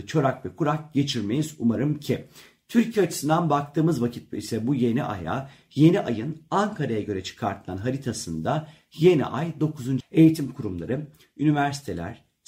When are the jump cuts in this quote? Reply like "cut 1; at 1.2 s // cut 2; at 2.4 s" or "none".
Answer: cut 1; at 10.0 s